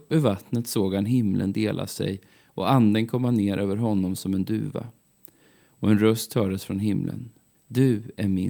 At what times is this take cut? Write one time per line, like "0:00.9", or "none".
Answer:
0:07.5